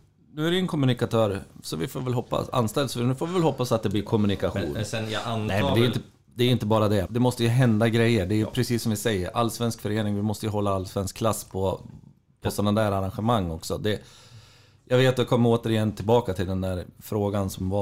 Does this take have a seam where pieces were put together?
yes; 1 cut; at 7.1 s

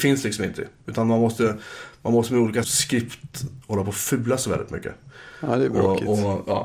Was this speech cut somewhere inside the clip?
yes; 1 cut; at 2.6 s

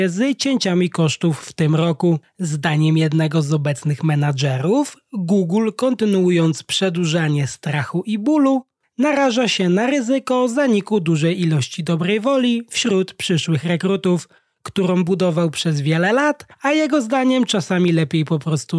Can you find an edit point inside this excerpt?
no; 0 cuts

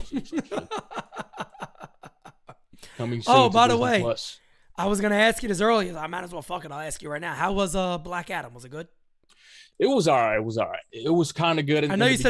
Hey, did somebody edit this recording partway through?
no; 0 cuts

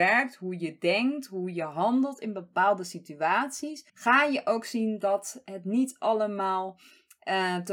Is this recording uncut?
no; 1 cut; at 3.9 s

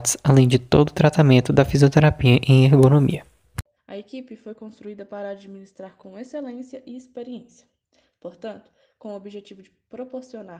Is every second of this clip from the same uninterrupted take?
no; 1 cut; at 3.8 s

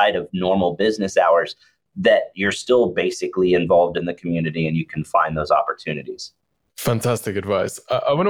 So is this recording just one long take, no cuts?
yes; 0 cuts

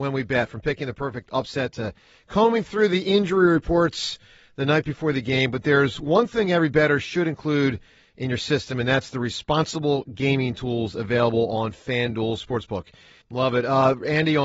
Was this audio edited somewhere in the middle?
yes; 1 cut; at 13.2 s

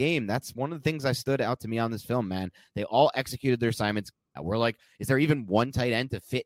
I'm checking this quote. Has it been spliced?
yes; 1 cut; at 4.4 s

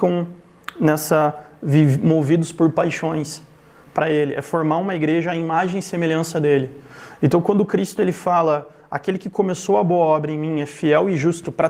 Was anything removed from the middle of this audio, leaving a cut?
yes; 1 cut; at 3.9 s

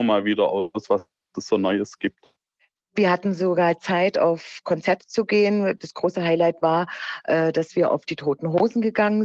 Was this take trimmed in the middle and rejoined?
no; 0 cuts

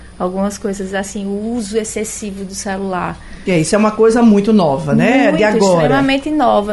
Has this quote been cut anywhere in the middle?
no; 0 cuts

